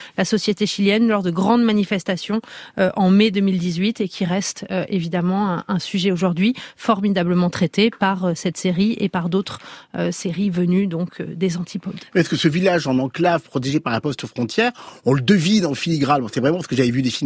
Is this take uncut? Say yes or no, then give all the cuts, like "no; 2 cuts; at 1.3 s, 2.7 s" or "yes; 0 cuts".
yes; 0 cuts